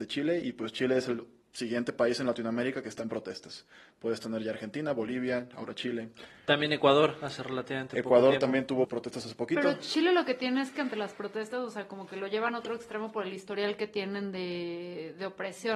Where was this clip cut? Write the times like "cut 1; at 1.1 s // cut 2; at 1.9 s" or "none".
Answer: cut 1; at 8.8 s